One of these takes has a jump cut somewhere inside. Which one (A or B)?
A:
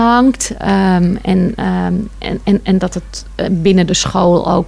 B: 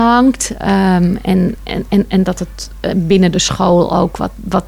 B